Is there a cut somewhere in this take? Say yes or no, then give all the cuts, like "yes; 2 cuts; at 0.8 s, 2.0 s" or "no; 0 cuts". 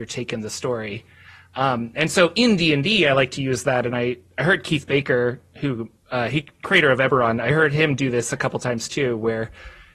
no; 0 cuts